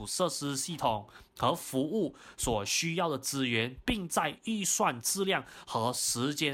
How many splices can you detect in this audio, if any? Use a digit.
1